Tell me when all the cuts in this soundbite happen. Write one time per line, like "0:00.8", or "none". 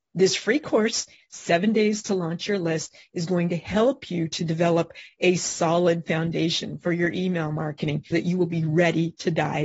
0:01.2
0:08.1